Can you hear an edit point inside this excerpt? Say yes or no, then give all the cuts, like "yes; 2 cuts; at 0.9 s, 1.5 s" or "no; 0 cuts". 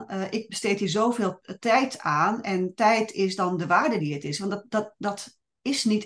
no; 0 cuts